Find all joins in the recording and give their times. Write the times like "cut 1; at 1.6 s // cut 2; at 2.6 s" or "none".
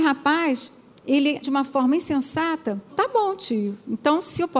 cut 1; at 1.4 s // cut 2; at 2.9 s